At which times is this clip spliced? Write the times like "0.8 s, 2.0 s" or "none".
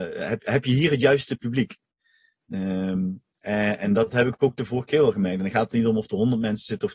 none